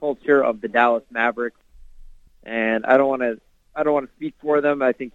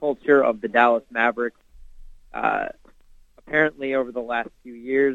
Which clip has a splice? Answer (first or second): first